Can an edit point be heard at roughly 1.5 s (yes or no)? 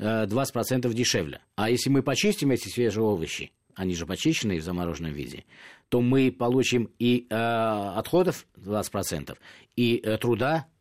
yes